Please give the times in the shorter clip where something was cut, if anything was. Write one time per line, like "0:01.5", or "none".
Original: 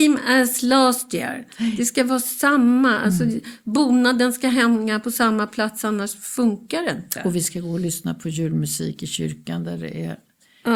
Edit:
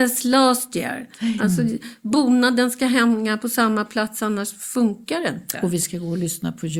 0:01.4